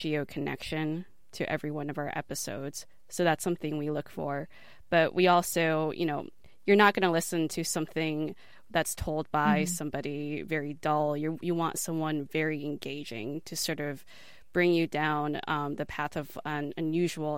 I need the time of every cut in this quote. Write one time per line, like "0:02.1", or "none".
none

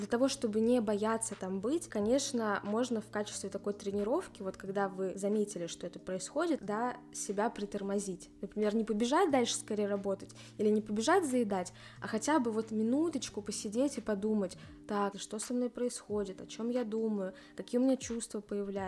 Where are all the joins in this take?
0:06.6
0:15.1

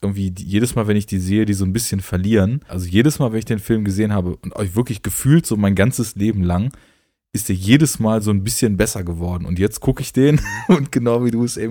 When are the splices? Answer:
0:02.7

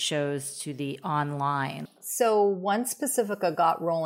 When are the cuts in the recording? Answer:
0:01.9

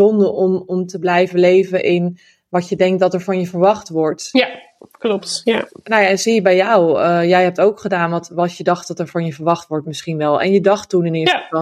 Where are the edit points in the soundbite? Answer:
none

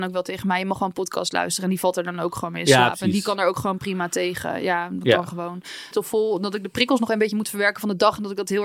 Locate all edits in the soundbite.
0:05.9

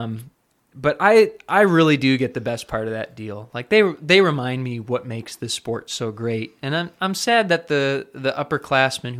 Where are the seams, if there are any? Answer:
none

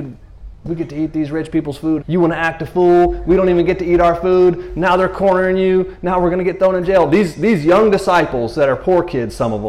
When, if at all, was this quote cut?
0:02.0

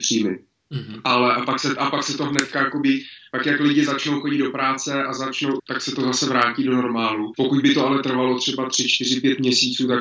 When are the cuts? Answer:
0:05.6
0:07.3

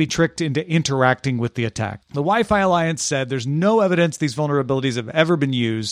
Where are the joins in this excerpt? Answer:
0:02.0

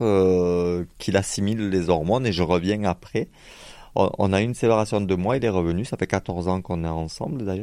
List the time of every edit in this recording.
none

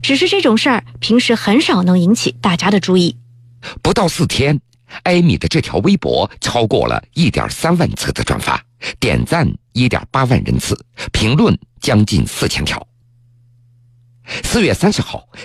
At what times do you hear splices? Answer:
none

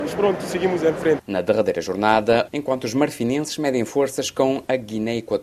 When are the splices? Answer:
0:01.2
0:02.5

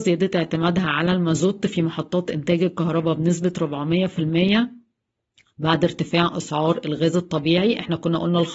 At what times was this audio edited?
none

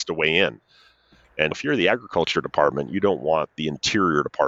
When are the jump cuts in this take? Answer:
0:01.5

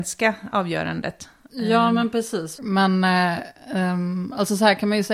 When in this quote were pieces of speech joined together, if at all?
0:02.6

